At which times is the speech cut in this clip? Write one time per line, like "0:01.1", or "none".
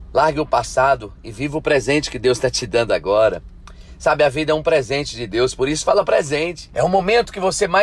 0:06.7